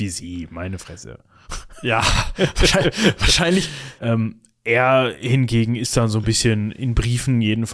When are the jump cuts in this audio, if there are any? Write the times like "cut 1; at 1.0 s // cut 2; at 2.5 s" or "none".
cut 1; at 4.0 s